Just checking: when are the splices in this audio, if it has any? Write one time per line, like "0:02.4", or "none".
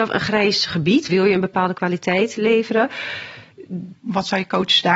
0:01.1
0:03.9